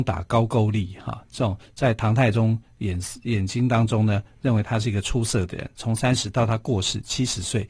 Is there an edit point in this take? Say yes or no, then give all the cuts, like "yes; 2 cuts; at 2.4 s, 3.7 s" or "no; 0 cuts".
no; 0 cuts